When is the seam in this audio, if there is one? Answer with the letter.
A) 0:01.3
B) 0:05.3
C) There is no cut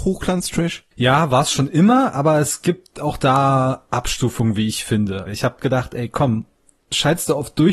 B